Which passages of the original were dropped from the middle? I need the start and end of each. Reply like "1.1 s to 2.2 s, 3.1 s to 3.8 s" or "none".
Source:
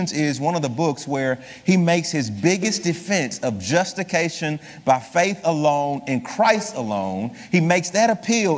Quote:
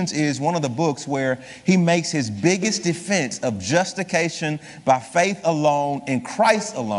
none